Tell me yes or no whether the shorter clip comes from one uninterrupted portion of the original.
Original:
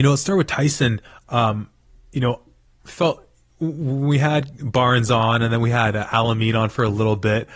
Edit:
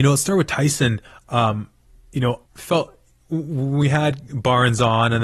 no